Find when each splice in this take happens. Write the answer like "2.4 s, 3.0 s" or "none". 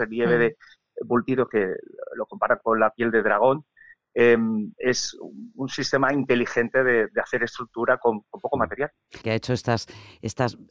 9.2 s